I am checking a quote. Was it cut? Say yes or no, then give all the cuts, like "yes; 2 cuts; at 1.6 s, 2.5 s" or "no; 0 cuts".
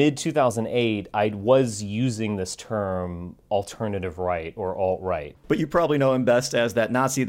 yes; 1 cut; at 5.4 s